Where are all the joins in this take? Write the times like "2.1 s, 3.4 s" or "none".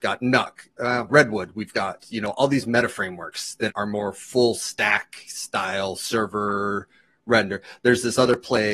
1.1 s, 3.7 s